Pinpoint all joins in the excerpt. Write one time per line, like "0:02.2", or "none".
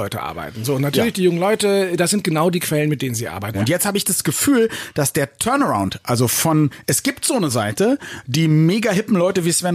0:03.5